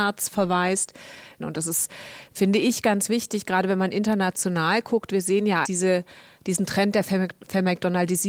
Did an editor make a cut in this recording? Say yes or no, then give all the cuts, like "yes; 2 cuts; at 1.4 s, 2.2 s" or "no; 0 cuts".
yes; 2 cuts; at 1.4 s, 5.6 s